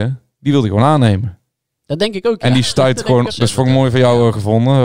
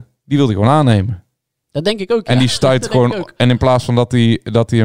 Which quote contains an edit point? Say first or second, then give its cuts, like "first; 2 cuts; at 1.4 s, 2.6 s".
first; 1 cut; at 3.3 s